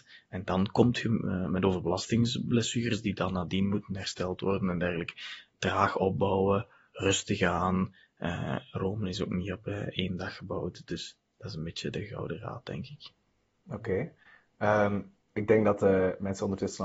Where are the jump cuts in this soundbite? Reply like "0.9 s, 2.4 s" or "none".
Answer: 5.5 s